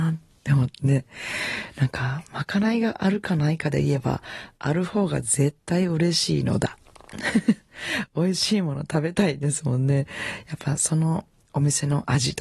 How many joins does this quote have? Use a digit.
0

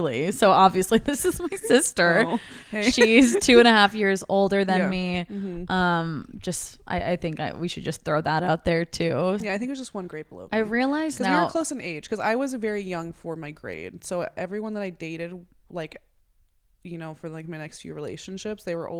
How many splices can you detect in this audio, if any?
1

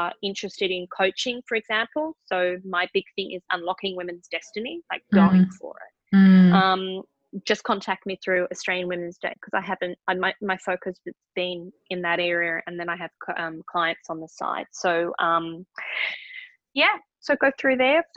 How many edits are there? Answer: 0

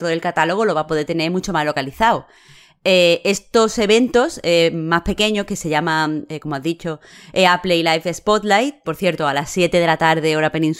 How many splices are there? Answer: 1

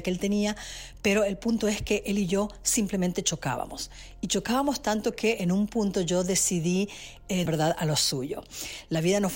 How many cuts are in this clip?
1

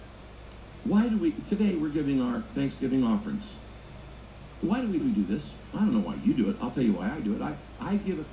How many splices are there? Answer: 1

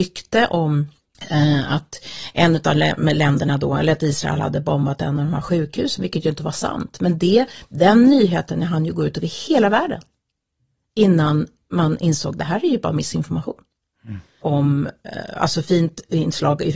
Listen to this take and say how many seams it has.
1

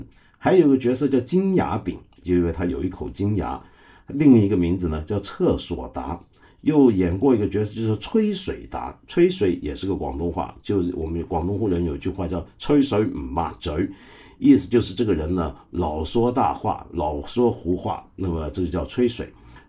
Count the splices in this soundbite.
0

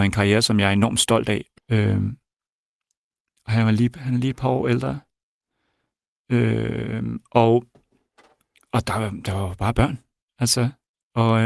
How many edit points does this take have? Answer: 1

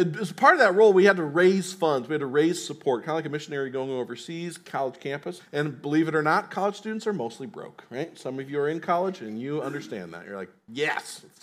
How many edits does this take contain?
1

